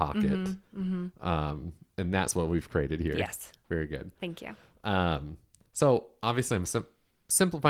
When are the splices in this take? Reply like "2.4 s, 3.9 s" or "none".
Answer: none